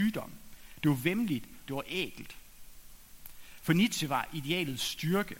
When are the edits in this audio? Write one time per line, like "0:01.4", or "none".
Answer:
0:01.7